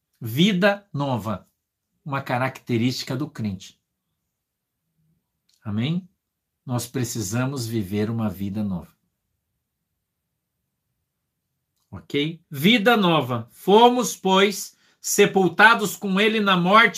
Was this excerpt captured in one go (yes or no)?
no